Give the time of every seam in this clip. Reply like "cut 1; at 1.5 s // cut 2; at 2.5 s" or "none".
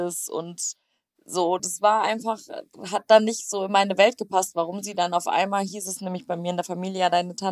none